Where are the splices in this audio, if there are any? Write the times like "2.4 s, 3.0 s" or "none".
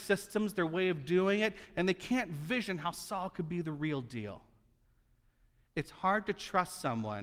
none